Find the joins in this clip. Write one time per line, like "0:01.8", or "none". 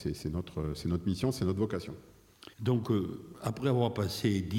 0:02.5